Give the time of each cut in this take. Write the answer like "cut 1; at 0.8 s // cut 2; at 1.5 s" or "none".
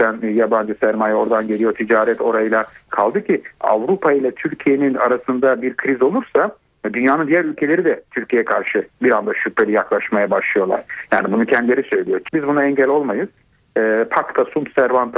cut 1; at 12.3 s